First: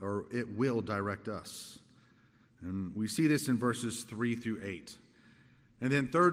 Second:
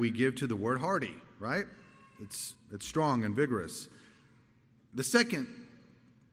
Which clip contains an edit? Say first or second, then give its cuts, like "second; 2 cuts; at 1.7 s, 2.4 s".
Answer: second; 1 cut; at 2.5 s